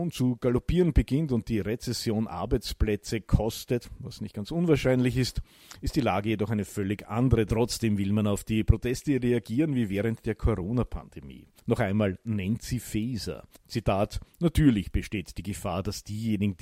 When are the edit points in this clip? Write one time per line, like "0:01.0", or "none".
0:07.5